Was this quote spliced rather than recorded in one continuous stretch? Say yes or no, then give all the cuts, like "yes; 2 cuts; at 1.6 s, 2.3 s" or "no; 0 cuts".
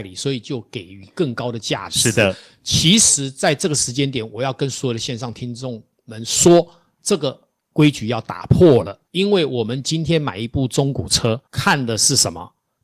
yes; 2 cuts; at 9.0 s, 11.4 s